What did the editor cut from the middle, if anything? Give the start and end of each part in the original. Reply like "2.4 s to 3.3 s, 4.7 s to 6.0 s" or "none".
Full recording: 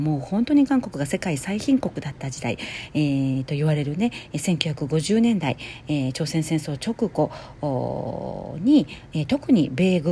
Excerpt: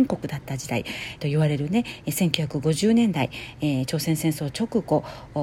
2.9 s to 3.5 s